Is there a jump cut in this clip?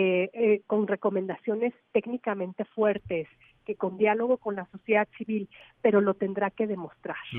yes; 1 cut; at 3.8 s

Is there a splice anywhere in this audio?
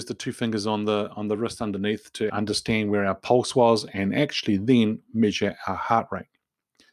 yes; 1 cut; at 2.3 s

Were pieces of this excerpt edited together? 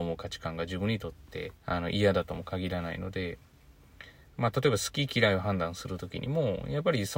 yes; 1 cut; at 1.6 s

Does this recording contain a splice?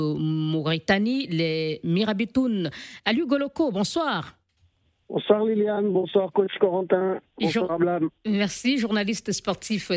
no; 0 cuts

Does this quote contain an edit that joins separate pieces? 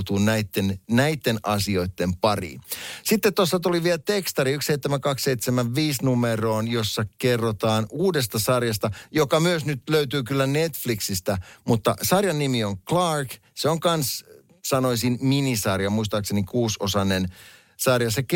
no; 0 cuts

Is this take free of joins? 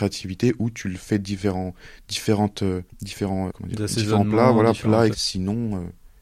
no; 2 cuts; at 3.5 s, 5.1 s

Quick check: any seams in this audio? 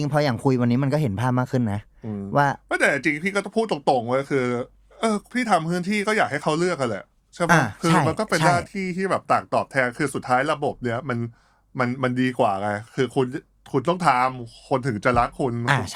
no; 0 cuts

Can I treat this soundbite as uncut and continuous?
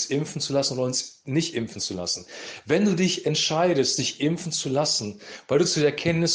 yes; 0 cuts

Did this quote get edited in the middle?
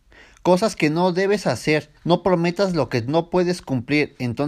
yes; 1 cut; at 2.0 s

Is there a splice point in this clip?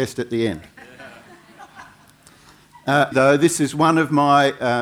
yes; 1 cut; at 3.1 s

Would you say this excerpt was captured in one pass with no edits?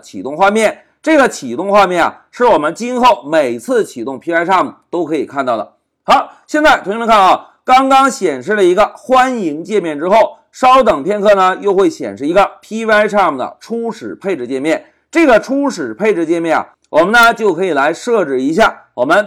yes; 0 cuts

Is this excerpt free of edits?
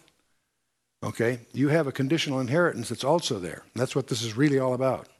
yes; 0 cuts

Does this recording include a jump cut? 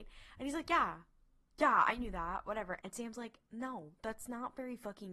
yes; 1 cut; at 2.8 s

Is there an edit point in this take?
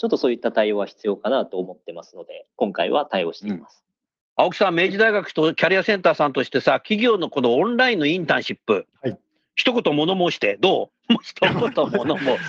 no; 0 cuts

